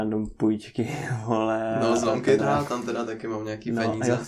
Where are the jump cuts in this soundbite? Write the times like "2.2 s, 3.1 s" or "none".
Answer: 2.4 s

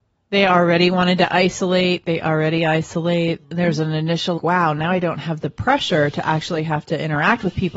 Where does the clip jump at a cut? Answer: 4.4 s

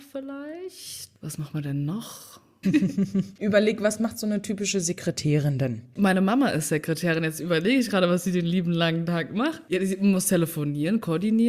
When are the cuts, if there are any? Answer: 2.6 s

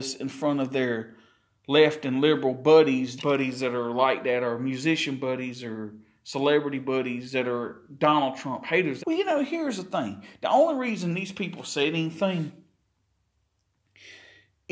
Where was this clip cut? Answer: 3.2 s, 9.0 s

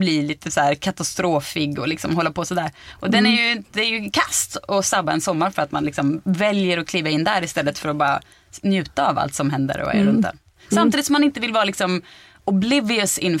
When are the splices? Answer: none

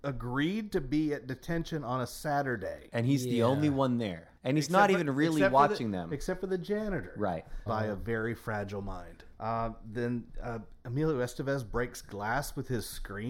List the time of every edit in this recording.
4.4 s, 7.7 s, 9.4 s

